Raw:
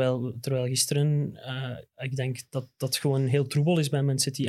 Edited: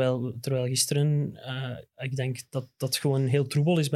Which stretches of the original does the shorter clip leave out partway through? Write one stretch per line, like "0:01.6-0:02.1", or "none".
none